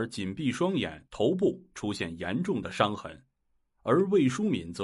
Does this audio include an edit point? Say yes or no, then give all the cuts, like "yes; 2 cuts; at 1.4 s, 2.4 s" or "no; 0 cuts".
yes; 1 cut; at 1.1 s